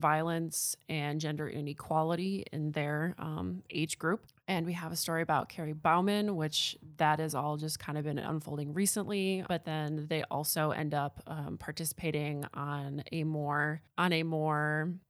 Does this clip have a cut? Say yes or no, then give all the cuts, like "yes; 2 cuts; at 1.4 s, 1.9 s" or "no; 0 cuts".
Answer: yes; 1 cut; at 9.5 s